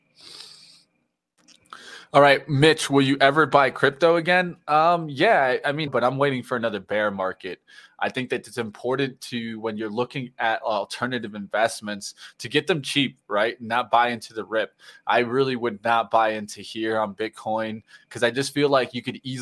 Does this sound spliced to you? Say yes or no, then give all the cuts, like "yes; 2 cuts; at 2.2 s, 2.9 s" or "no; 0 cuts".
yes; 1 cut; at 5.9 s